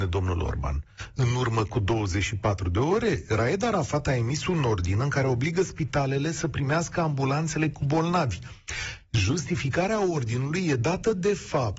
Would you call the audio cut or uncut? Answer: uncut